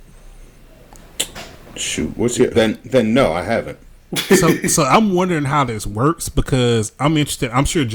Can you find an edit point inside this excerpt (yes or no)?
yes